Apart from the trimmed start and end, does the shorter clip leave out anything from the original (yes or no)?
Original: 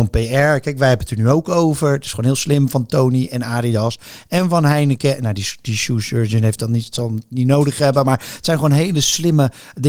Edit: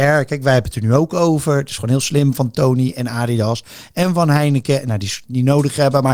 yes